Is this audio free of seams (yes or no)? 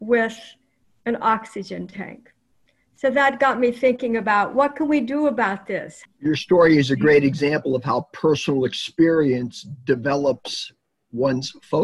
no